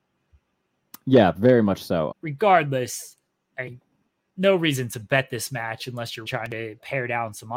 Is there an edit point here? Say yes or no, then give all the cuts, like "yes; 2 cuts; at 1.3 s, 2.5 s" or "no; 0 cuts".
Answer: yes; 2 cuts; at 2.1 s, 6.3 s